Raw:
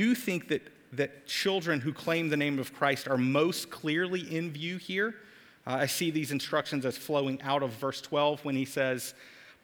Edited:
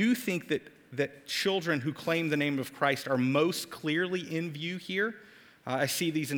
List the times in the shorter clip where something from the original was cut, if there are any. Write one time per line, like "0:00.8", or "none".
none